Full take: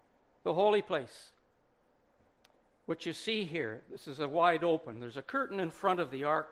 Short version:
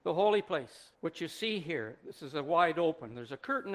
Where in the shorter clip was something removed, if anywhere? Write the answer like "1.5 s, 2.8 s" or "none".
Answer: 0.9 s